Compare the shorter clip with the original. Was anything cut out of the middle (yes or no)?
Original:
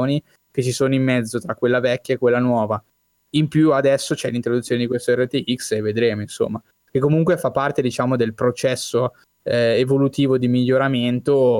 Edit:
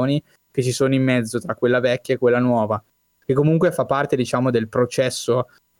yes